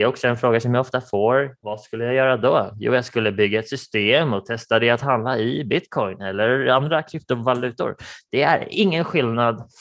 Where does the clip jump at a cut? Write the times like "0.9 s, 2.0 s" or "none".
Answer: 1.6 s